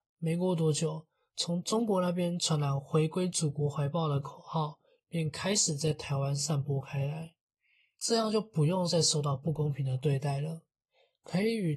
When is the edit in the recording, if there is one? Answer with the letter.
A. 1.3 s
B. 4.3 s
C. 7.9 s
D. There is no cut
C